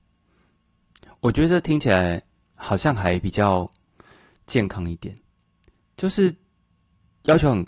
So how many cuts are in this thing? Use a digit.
0